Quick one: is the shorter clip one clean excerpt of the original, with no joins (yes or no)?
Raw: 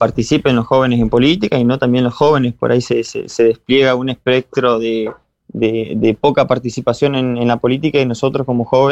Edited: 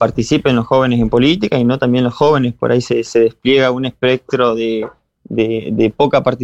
no